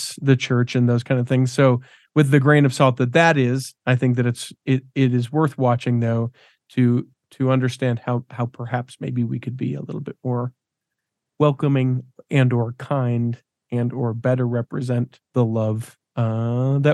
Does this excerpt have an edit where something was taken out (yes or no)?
yes